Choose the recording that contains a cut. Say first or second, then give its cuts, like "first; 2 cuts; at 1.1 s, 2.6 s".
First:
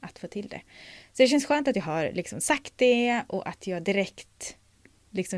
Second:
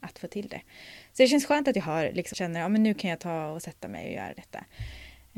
second; 1 cut; at 2.3 s